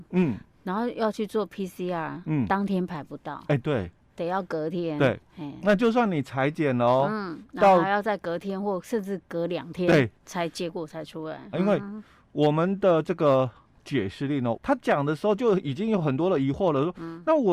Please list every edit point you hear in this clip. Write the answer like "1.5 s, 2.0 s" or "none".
11.5 s, 14.6 s

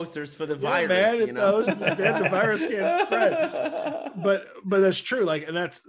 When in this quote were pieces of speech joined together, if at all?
none

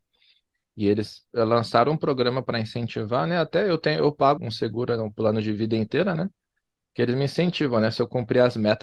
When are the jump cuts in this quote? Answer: 4.4 s

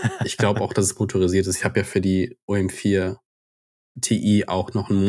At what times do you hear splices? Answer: none

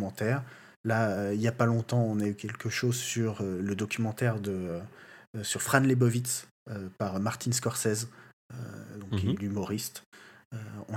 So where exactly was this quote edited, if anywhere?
none

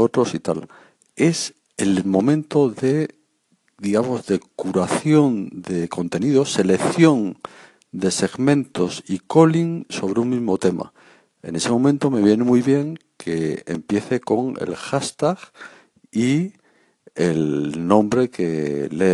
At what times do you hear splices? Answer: none

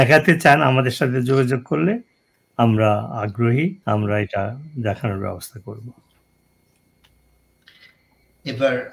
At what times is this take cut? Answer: 3.8 s

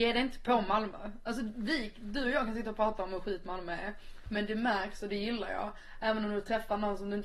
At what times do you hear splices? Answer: none

